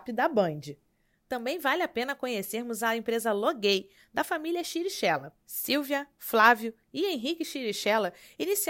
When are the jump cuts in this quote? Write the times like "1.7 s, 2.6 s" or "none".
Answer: 5.4 s